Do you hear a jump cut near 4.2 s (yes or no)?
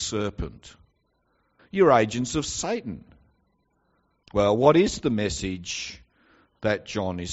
yes